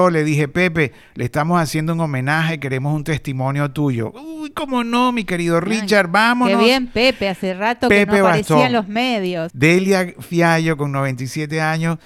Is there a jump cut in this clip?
yes; 1 cut; at 9.5 s

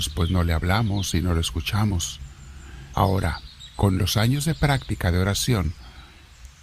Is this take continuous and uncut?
no; 1 cut; at 2.9 s

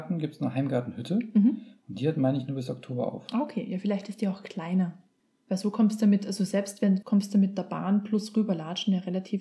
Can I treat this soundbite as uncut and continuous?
no; 1 cut; at 7.0 s

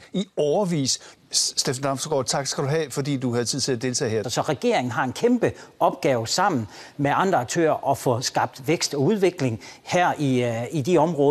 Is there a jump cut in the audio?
yes; 2 cuts; at 1.2 s, 4.2 s

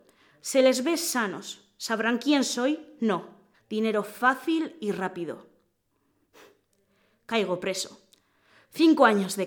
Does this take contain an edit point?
yes; 1 cut; at 3.5 s

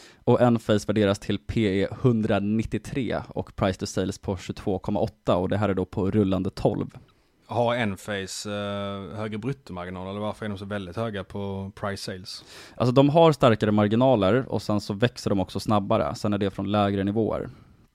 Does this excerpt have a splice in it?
no; 0 cuts

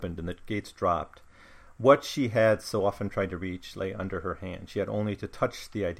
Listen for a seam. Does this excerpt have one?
no; 0 cuts

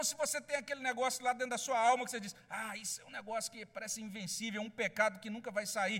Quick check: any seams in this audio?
no; 0 cuts

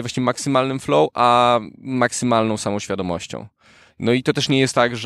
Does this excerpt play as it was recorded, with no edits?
yes; 0 cuts

